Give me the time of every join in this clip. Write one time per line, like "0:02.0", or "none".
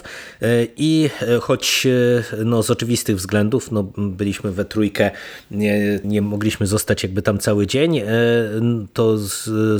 0:06.0